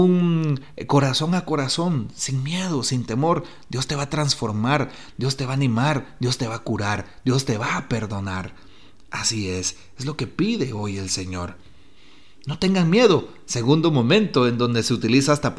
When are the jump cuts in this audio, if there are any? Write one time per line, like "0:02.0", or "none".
none